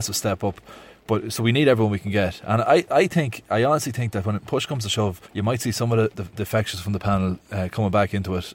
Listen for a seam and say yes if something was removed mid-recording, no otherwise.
yes